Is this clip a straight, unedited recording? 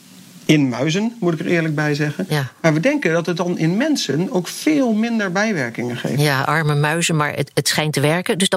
yes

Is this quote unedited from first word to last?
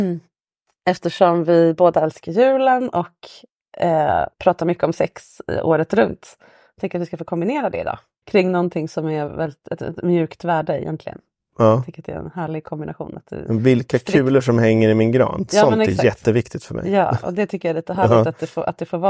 no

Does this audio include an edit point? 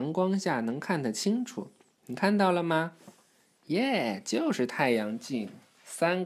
no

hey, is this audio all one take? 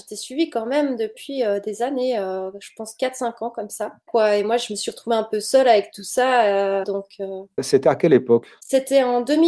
no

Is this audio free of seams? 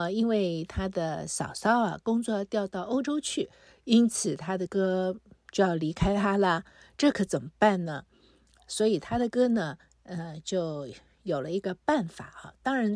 no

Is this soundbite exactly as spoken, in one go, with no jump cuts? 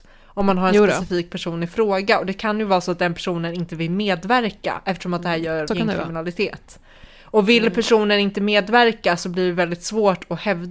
no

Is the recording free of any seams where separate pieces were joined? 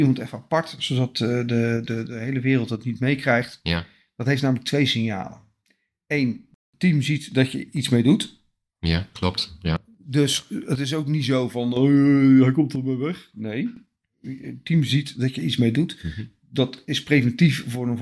yes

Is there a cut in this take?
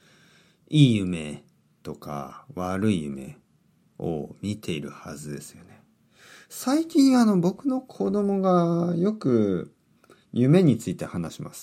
no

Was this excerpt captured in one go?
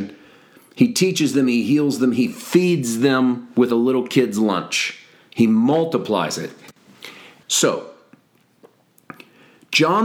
no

